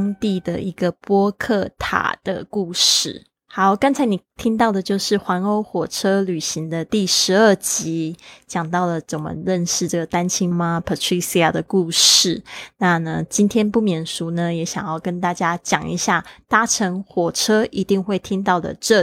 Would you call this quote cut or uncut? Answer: cut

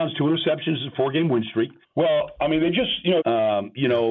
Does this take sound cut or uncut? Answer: cut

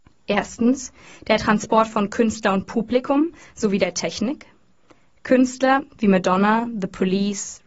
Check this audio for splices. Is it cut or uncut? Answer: cut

